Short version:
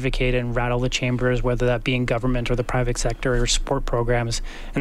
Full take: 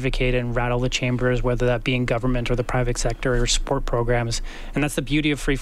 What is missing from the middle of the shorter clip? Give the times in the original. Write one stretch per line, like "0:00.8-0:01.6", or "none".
none